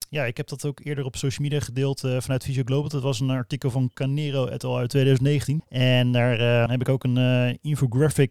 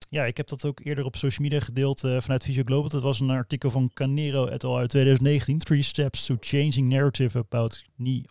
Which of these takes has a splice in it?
first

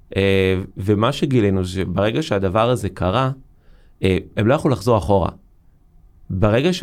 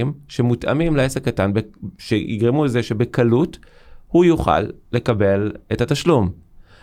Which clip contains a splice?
first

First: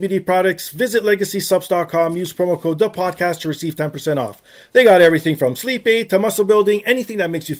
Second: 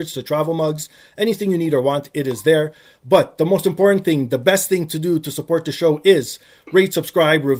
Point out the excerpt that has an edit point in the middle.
second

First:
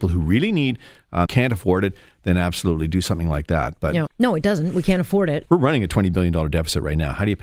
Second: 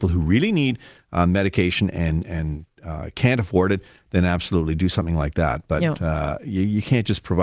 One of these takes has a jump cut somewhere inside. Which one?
first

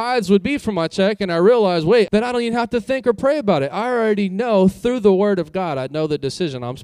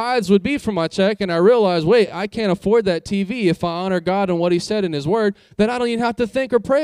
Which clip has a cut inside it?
first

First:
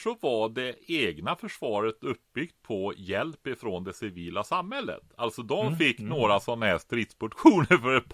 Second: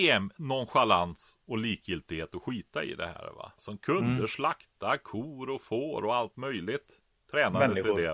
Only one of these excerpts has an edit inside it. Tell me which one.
second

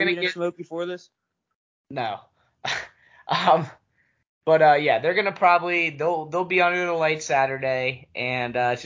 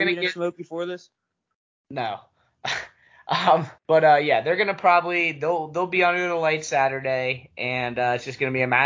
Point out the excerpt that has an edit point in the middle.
second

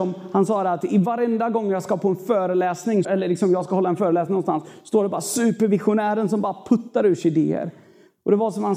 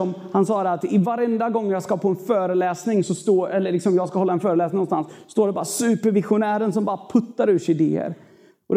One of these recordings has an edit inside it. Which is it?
first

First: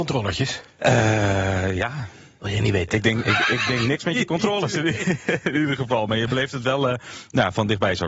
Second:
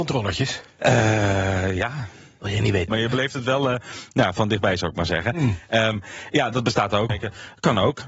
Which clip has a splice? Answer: second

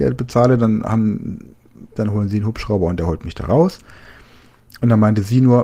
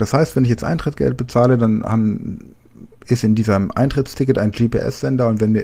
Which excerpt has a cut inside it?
first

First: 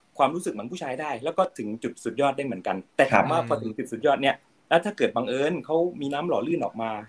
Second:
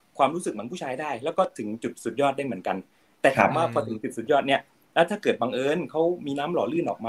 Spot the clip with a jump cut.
first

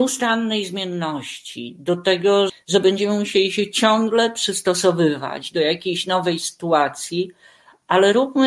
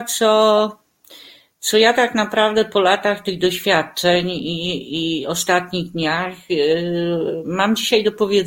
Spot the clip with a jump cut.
first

